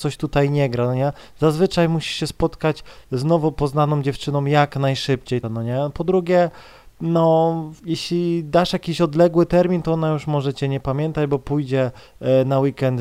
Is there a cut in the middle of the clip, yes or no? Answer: yes